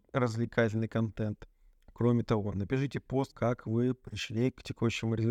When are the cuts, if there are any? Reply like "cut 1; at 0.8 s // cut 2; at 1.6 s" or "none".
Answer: cut 1; at 1.7 s // cut 2; at 3.3 s